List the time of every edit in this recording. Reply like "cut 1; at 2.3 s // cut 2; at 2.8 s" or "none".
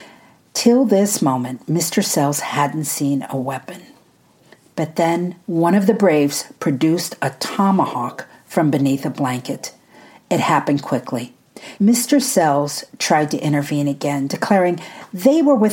cut 1; at 5.4 s // cut 2; at 11.8 s